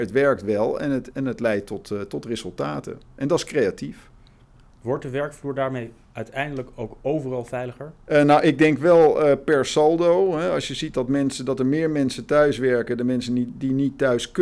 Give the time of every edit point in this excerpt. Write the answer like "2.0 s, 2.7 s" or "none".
1.1 s